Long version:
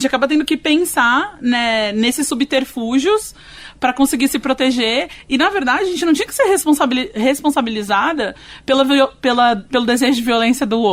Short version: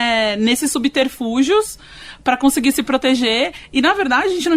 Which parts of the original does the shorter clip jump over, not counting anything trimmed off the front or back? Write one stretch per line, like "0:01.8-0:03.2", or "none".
none

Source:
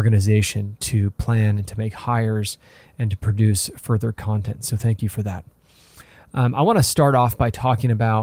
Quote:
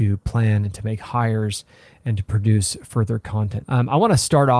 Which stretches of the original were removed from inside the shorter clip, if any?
0:04.6-0:06.3

